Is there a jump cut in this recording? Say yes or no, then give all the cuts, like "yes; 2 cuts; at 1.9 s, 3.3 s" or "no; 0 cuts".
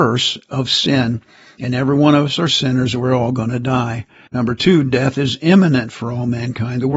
yes; 1 cut; at 4.3 s